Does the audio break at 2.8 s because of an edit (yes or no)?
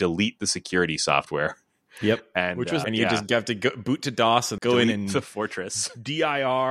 yes